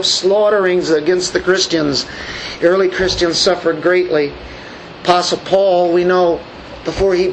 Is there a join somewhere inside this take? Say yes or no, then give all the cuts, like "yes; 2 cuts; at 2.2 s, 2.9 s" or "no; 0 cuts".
yes; 1 cut; at 2.6 s